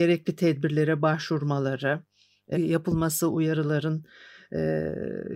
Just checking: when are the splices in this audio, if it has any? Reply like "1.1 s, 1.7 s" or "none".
2.5 s